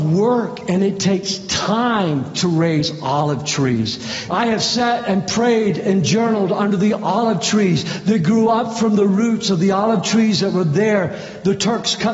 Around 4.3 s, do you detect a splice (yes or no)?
yes